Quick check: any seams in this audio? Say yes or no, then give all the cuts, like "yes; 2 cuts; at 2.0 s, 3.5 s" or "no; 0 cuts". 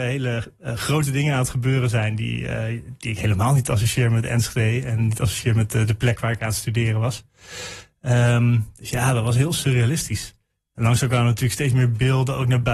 no; 0 cuts